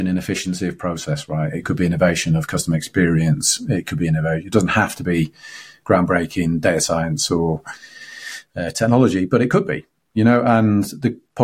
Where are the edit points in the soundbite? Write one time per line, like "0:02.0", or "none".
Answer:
none